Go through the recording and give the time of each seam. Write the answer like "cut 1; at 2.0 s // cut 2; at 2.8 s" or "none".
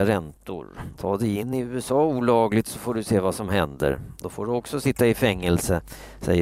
cut 1; at 0.9 s